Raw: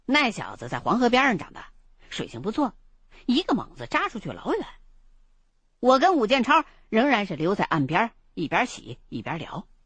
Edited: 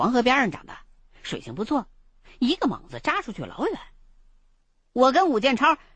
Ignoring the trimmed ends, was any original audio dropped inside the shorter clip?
no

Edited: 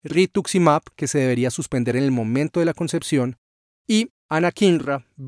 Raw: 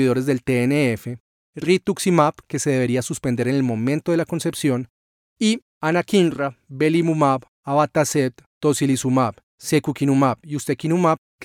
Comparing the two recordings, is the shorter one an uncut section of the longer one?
yes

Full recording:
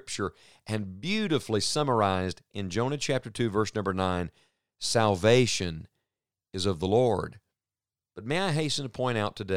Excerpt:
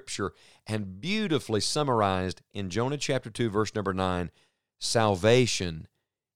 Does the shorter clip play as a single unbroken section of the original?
yes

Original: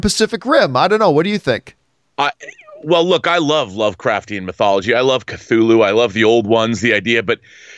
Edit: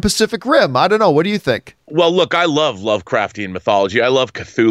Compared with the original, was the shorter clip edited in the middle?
yes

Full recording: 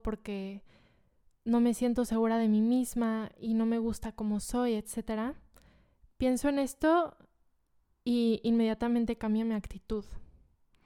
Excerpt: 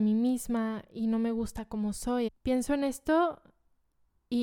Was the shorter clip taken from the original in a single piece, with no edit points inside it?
no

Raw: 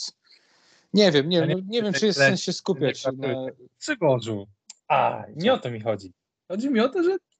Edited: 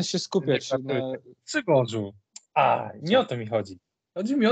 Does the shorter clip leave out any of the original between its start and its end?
no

